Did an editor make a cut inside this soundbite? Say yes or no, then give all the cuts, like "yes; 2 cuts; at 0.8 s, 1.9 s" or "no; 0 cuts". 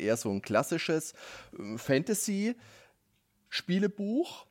no; 0 cuts